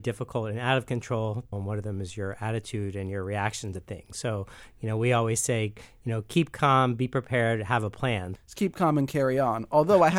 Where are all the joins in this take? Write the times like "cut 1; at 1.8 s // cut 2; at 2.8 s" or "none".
cut 1; at 1.5 s // cut 2; at 8.4 s